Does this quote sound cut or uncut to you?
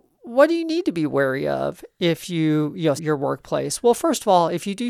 cut